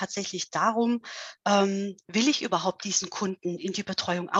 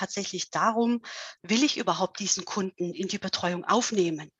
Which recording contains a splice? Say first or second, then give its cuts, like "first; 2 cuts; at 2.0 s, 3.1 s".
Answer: second; 1 cut; at 1.4 s